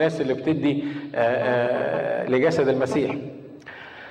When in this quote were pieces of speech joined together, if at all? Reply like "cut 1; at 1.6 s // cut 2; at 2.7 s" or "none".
none